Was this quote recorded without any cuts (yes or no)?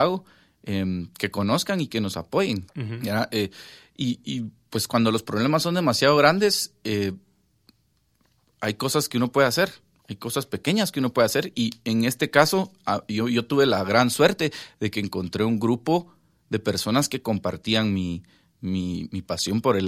no